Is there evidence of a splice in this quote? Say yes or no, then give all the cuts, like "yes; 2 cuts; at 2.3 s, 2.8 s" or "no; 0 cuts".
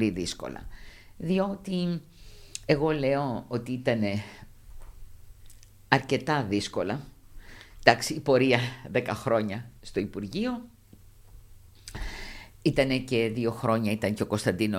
no; 0 cuts